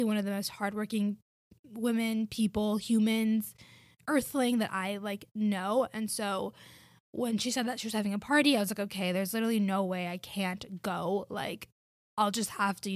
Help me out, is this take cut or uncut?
uncut